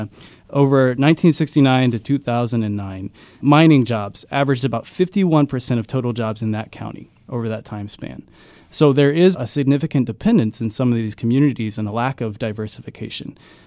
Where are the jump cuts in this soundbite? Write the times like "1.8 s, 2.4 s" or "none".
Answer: 3.4 s, 9.3 s